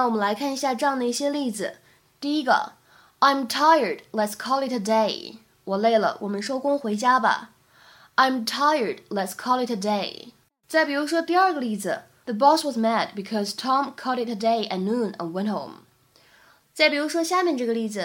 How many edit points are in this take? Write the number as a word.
one